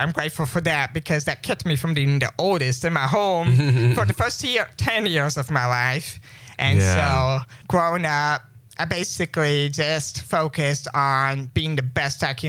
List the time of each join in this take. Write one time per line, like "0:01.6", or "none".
none